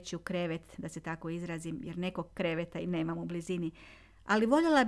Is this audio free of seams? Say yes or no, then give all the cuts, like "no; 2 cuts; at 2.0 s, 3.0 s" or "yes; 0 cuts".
yes; 0 cuts